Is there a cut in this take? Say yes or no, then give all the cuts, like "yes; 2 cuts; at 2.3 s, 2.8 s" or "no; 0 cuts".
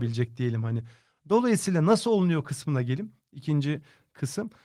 no; 0 cuts